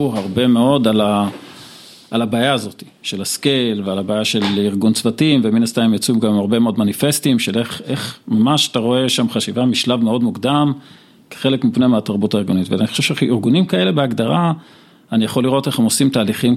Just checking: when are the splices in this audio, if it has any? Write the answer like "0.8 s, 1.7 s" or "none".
none